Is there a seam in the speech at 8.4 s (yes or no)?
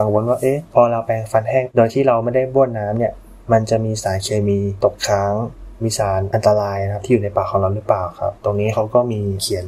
yes